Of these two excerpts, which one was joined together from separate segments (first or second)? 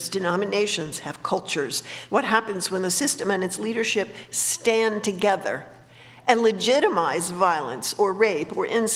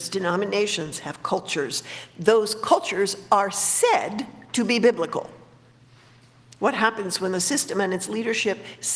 first